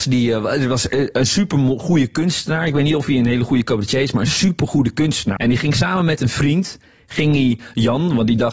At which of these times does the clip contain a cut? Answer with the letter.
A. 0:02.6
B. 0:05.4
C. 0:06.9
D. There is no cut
B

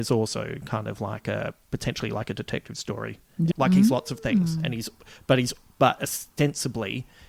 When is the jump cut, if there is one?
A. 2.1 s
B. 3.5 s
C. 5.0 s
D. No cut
B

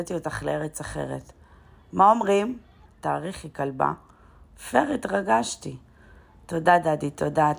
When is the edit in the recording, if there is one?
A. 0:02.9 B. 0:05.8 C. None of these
A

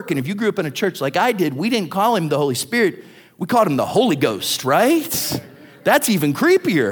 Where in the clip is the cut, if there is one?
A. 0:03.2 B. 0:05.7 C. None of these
C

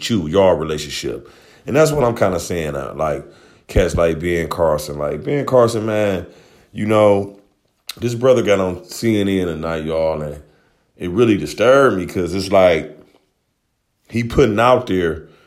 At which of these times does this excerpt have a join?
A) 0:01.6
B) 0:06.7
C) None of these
C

